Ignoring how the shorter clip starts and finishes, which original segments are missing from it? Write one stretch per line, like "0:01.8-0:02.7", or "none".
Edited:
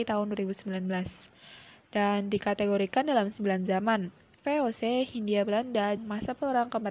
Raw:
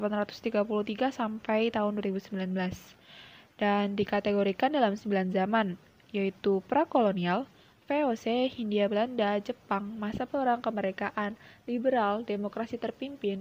0:06.0-0:07.8
0:09.4-0:09.9